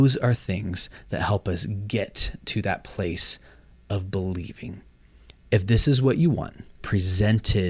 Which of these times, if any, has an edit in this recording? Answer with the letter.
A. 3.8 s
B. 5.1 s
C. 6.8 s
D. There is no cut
C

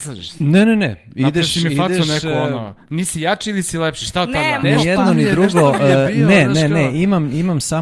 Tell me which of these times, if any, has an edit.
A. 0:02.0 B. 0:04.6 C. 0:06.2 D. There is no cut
B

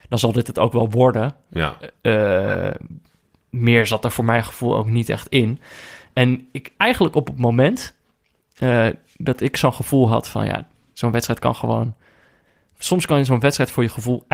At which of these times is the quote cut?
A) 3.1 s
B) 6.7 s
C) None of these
B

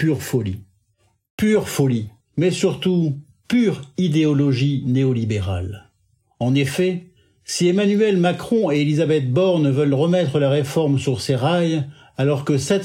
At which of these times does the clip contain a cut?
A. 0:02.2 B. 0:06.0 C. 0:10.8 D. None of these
A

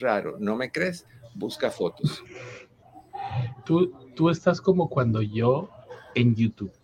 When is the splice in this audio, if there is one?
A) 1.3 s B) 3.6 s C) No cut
B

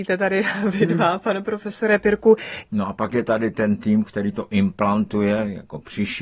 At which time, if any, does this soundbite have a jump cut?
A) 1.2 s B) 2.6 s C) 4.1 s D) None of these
B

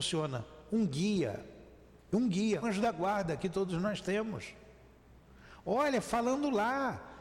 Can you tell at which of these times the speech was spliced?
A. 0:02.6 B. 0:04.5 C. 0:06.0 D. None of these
A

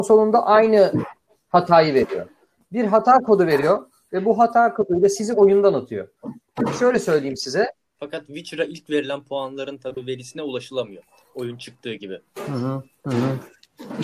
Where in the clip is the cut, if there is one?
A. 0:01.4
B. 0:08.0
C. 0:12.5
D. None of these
B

